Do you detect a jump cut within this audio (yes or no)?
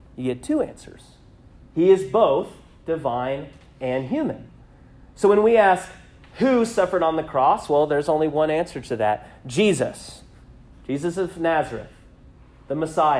no